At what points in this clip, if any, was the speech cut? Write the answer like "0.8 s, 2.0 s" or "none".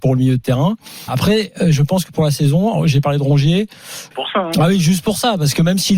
1.1 s, 4.1 s